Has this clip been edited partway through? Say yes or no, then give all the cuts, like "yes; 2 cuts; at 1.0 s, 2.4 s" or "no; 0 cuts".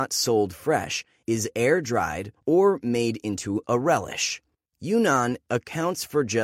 yes; 1 cut; at 2.4 s